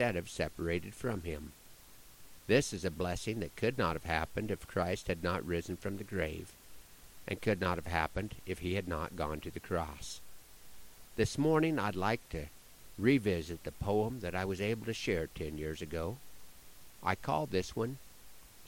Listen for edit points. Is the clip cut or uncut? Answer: uncut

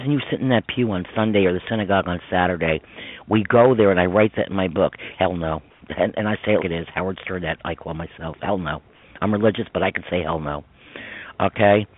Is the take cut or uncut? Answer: cut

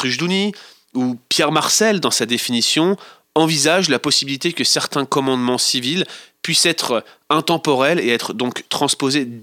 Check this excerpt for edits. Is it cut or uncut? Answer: uncut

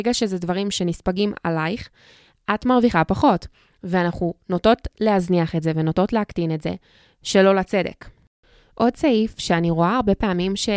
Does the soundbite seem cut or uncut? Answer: uncut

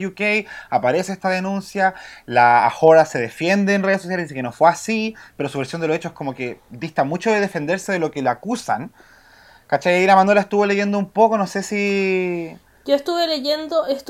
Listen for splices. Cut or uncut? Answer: uncut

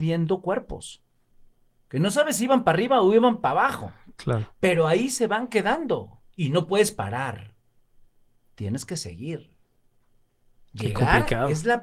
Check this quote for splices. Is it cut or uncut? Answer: uncut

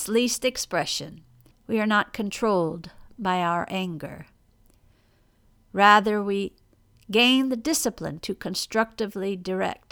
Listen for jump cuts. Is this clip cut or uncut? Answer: cut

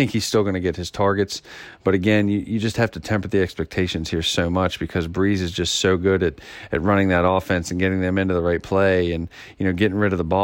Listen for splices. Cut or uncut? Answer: uncut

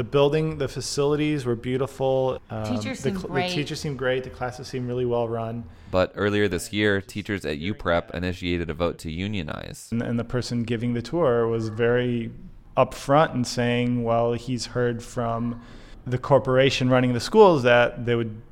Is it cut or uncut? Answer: uncut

